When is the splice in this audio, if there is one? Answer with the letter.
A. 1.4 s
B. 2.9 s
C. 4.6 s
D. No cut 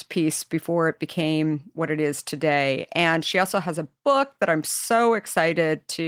D